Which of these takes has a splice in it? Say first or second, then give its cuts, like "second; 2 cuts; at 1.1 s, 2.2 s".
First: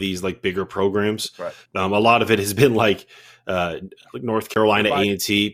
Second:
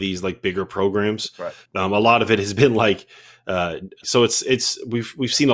second; 1 cut; at 4.0 s